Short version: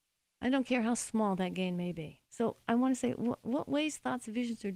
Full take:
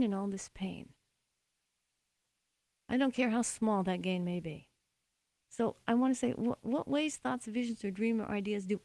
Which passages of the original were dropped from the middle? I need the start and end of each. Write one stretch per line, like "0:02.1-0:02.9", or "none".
0:04.7-0:05.4